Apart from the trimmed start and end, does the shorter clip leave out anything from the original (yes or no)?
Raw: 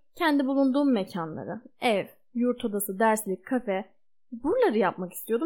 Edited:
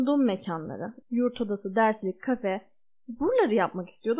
yes